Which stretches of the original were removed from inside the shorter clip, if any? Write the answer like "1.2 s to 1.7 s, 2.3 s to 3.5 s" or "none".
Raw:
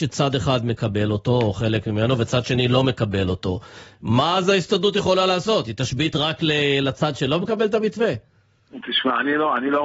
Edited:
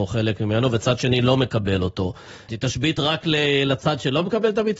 4.0 s to 5.6 s